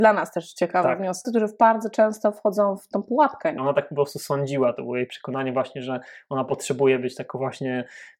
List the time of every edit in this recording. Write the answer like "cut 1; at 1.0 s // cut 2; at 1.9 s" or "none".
cut 1; at 1.2 s // cut 2; at 3.6 s